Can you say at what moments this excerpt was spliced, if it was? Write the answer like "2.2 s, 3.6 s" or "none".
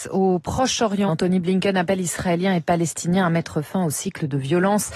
1.1 s